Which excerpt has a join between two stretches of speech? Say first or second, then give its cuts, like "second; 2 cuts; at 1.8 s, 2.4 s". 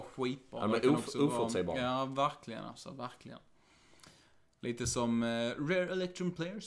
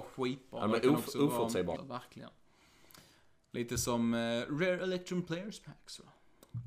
second; 1 cut; at 1.7 s